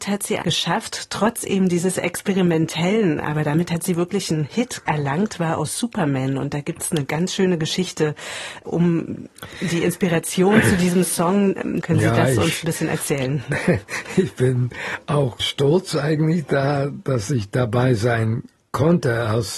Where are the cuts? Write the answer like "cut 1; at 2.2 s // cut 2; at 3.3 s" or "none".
cut 1; at 11.8 s